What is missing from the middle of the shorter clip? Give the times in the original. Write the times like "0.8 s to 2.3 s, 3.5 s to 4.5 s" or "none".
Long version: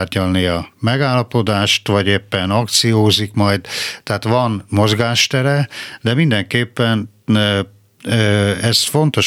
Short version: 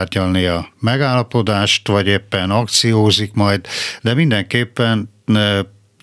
4.0 s to 6.0 s